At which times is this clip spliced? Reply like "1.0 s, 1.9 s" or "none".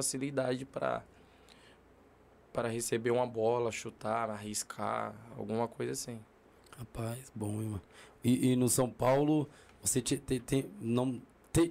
none